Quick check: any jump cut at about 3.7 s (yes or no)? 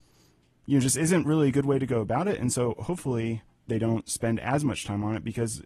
yes